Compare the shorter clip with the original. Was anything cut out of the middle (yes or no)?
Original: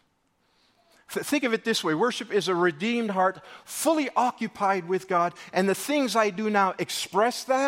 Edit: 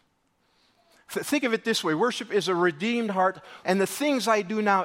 yes